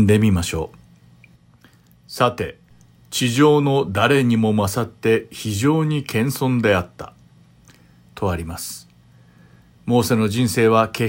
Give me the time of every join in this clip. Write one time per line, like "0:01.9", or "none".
0:02.9